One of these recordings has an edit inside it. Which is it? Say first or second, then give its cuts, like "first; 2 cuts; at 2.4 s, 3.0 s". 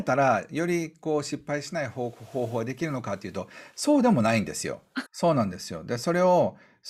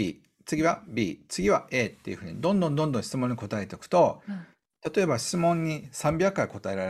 first; 1 cut; at 5.1 s